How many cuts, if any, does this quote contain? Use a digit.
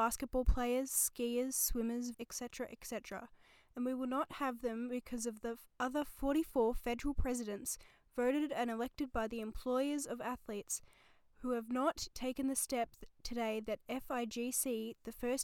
2